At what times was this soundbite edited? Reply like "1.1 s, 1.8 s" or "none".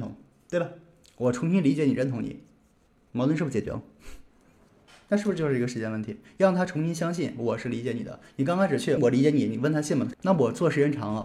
9.0 s, 10.1 s